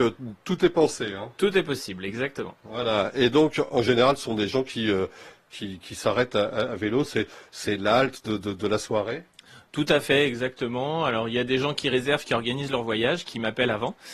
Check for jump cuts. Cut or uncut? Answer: uncut